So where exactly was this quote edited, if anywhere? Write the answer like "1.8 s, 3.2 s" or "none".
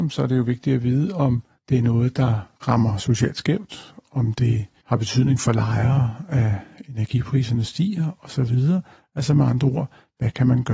none